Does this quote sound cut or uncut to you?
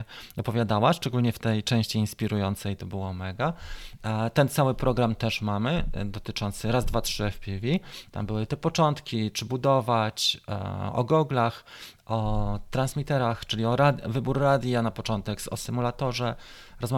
cut